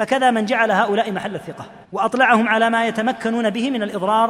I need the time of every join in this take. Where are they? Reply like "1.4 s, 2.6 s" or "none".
1.8 s